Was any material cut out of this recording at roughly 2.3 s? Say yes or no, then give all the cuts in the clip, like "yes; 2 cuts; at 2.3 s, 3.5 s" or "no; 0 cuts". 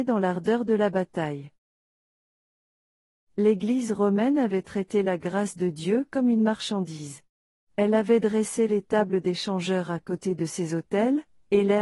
no; 0 cuts